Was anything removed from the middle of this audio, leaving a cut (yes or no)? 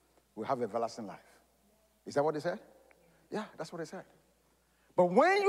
no